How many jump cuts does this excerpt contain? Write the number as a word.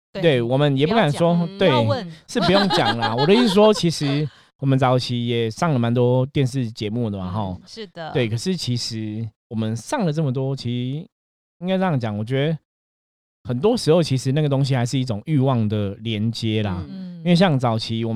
two